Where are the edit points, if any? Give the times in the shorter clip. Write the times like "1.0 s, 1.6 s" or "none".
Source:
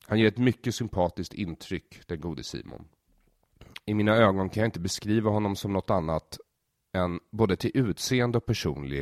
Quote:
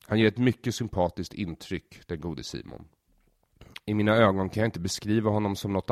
none

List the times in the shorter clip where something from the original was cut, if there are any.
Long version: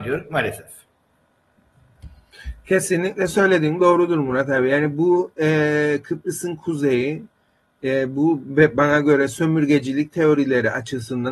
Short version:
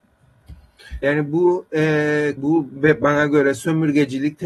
1.0 s, 2.4 s

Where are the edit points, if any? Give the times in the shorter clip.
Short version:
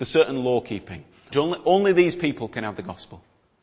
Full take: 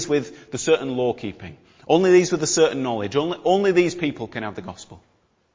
1.3 s

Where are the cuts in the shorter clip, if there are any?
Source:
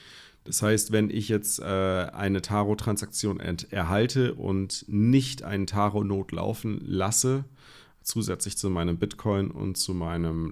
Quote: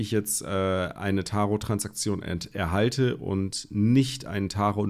none

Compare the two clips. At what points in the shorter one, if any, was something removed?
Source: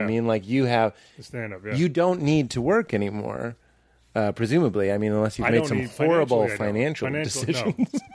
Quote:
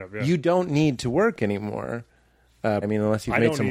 2.8 s

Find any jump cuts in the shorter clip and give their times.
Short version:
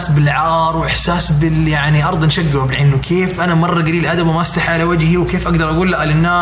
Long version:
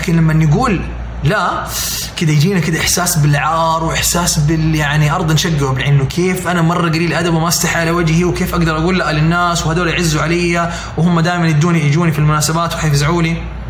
none

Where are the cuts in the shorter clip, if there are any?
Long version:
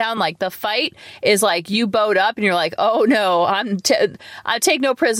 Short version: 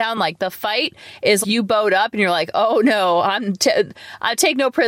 1.4 s

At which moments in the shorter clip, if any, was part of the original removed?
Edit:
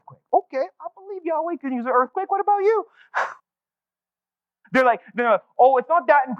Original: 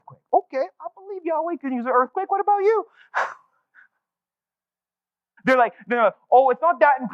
3.4 s

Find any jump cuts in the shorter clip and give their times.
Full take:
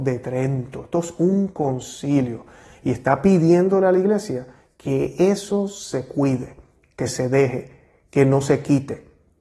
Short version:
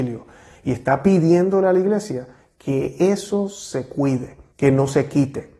4.5 s

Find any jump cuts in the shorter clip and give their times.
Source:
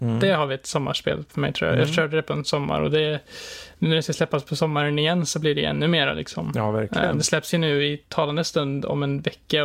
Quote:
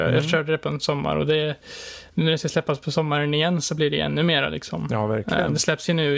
none

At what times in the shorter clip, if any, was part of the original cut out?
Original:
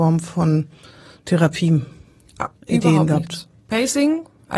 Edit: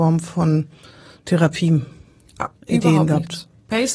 none

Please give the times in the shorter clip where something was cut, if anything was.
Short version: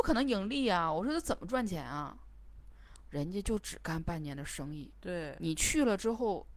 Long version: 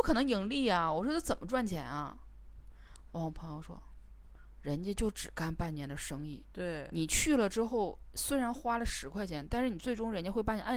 3.1 s

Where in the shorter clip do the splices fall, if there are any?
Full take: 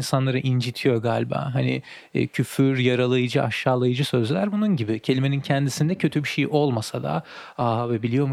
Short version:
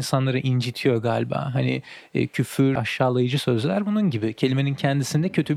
2.8 s

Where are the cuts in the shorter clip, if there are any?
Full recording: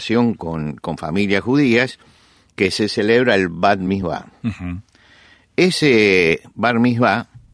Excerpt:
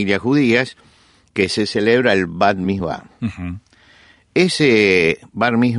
none

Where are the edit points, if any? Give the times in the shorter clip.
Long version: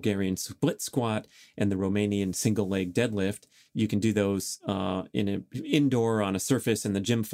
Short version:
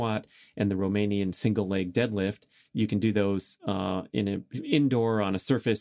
none

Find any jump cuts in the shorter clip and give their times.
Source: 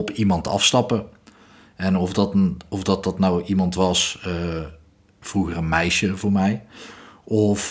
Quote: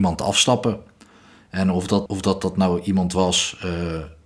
2.1 s

